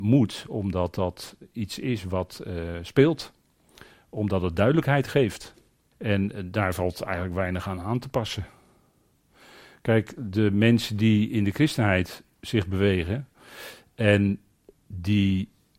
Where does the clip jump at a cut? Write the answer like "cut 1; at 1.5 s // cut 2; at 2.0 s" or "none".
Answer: cut 1; at 5.9 s

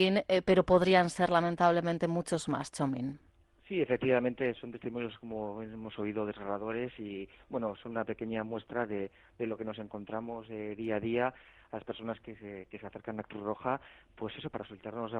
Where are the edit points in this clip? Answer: none

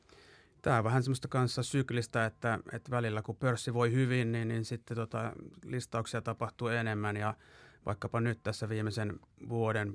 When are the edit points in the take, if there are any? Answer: none

